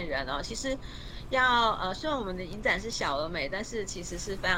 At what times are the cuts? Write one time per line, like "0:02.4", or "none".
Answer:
none